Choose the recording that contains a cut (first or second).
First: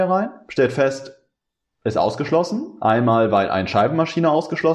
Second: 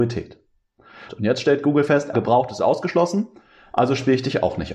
second